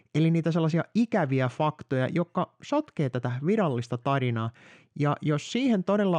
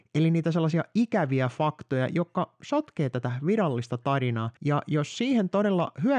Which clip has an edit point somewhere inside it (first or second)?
second